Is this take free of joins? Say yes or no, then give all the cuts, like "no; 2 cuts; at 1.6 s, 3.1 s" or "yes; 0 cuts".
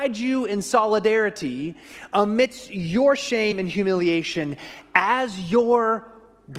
yes; 0 cuts